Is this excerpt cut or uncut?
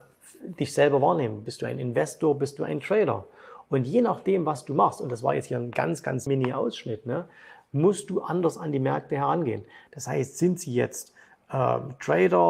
cut